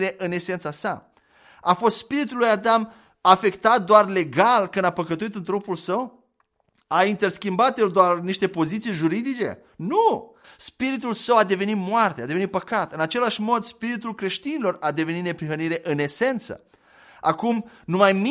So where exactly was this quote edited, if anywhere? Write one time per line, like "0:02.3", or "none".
0:10.4